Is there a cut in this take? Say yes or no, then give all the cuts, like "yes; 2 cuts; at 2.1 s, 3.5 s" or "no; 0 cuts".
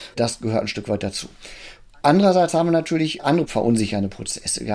no; 0 cuts